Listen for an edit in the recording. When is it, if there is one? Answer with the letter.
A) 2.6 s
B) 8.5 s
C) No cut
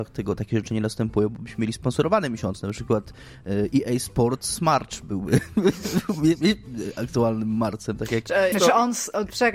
B